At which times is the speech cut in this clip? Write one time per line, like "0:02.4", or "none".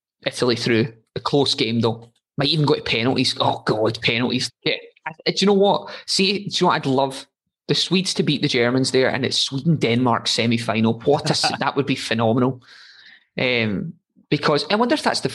0:04.5